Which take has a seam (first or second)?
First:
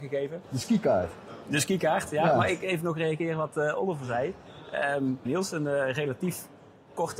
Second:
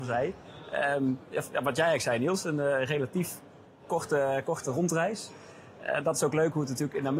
first